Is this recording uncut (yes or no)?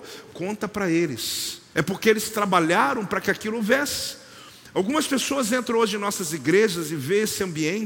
no